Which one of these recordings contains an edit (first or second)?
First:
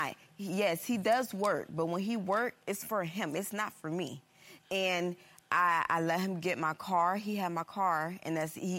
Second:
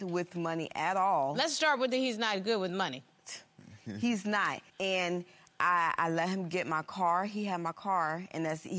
second